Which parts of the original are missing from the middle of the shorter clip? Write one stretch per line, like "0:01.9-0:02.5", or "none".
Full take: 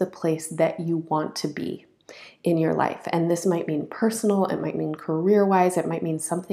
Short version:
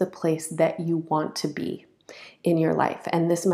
none